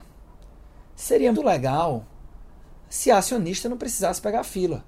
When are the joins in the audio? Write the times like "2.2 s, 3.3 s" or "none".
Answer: 1.3 s